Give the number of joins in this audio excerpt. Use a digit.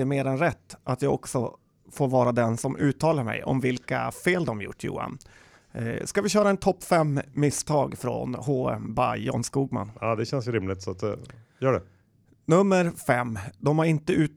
0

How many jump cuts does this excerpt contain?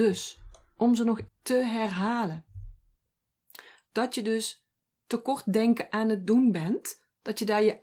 2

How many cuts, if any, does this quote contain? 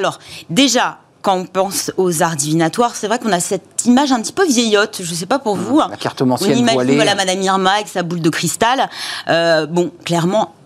0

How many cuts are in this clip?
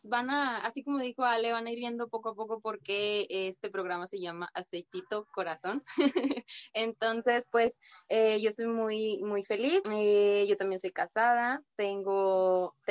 1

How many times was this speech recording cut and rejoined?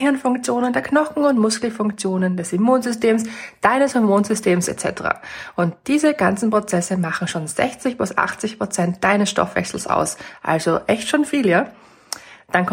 0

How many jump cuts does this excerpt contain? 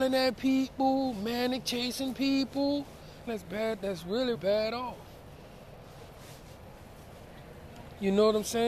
2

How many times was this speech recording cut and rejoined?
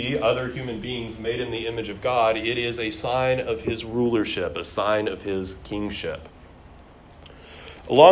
0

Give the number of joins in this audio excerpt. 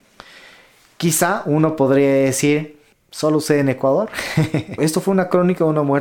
2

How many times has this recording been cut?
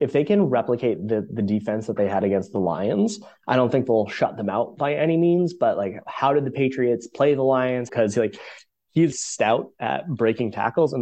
2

